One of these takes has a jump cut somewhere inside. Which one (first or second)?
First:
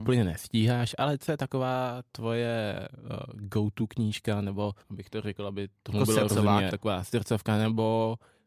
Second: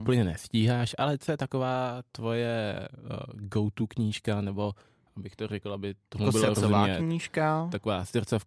first